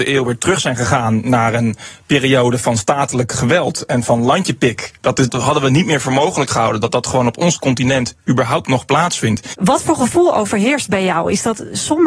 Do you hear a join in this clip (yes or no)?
yes